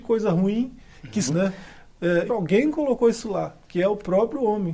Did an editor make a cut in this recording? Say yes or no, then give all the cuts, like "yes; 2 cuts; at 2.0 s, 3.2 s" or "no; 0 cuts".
yes; 2 cuts; at 1.3 s, 2.3 s